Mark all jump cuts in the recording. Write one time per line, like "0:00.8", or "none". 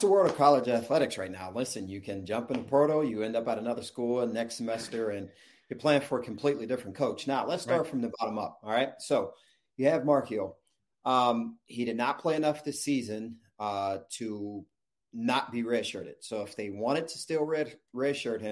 none